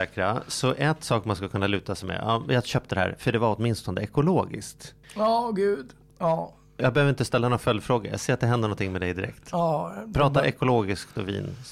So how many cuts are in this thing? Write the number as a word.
two